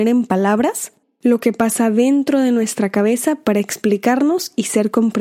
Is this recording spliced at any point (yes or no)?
yes